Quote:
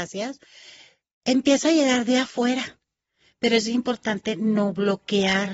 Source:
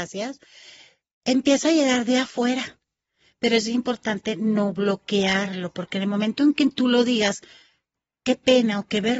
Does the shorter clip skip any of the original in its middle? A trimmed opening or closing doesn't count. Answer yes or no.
no